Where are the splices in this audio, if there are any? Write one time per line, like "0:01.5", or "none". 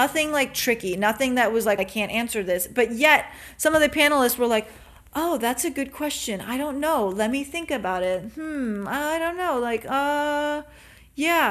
0:01.8